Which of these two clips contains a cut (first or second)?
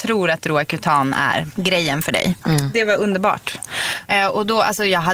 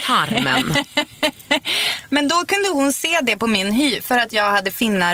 first